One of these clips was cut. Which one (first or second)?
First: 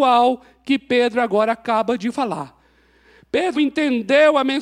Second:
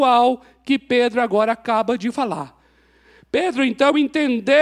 first